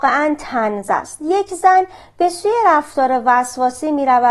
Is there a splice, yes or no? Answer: no